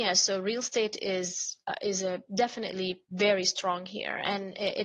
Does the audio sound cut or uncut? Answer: uncut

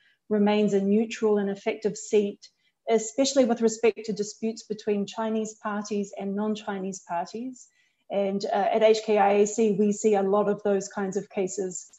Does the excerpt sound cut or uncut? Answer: uncut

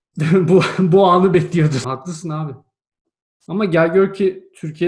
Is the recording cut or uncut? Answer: cut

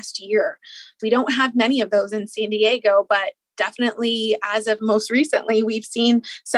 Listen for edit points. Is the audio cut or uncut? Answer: cut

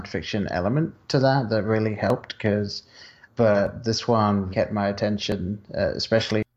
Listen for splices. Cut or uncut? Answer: cut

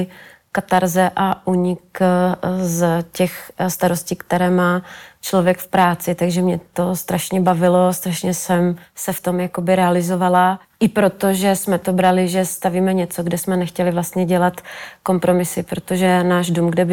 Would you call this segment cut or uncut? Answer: uncut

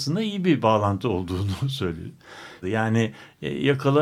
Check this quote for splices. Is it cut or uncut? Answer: cut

